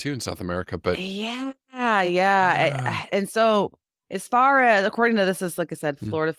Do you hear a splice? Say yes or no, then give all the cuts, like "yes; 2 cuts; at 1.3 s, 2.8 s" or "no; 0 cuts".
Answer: no; 0 cuts